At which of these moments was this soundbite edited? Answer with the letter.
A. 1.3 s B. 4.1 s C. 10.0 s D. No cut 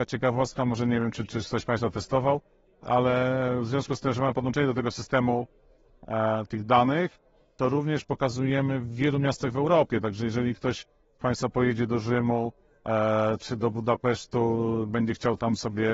A